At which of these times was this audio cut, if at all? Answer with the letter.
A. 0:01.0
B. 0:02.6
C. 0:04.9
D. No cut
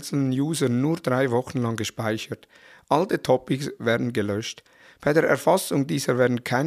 D